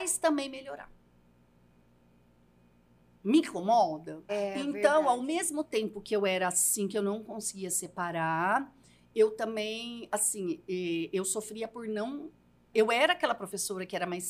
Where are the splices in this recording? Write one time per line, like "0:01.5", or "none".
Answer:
0:04.3
0:12.7